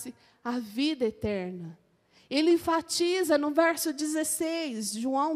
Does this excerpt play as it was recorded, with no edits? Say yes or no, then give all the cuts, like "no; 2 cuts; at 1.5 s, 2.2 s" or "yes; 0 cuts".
yes; 0 cuts